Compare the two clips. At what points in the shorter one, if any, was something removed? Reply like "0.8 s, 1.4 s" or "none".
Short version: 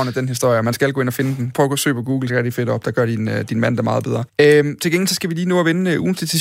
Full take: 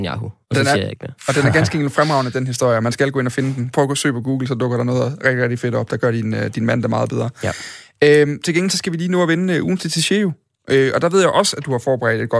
2.3 s, 4.3 s